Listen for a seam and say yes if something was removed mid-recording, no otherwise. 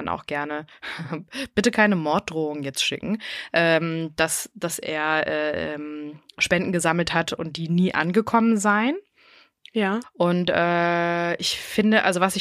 yes